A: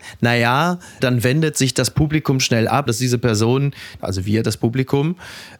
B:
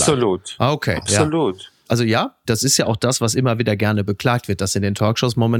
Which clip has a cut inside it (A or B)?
A